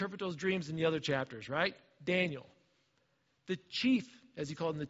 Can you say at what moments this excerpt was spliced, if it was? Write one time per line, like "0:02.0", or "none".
none